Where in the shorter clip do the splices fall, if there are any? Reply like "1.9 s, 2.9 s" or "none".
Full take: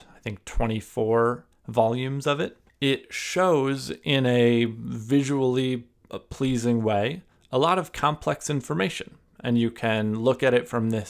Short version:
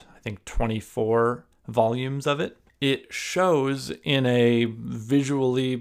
none